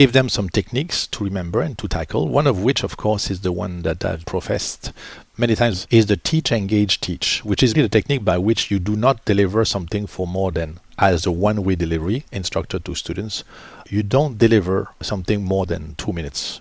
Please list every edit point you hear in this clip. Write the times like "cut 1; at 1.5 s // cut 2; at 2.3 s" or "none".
cut 1; at 7.7 s